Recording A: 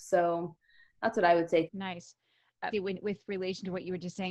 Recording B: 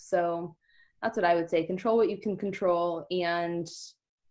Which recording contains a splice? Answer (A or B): A